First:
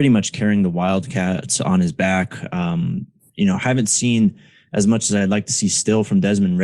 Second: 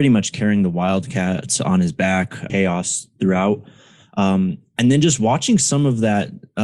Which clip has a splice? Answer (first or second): second